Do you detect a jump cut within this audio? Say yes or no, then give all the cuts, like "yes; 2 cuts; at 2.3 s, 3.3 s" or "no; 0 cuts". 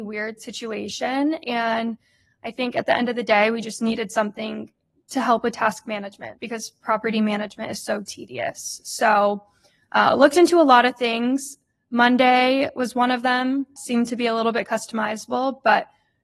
no; 0 cuts